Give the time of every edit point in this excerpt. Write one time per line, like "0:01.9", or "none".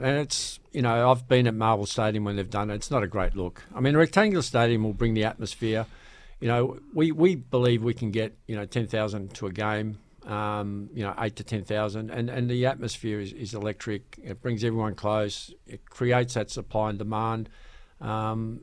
none